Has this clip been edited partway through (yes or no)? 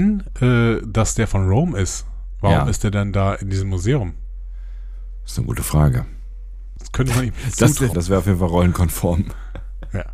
yes